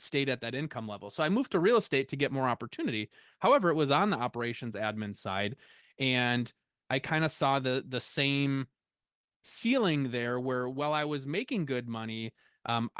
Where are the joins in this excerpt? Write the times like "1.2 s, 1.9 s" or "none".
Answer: none